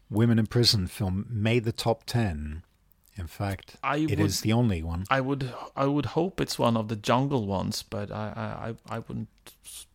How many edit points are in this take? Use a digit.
0